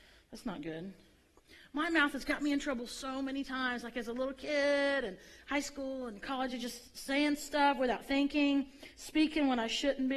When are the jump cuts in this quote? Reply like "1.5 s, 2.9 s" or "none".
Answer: none